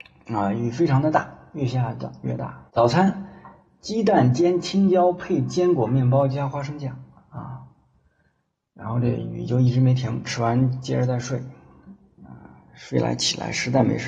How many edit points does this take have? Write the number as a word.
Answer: one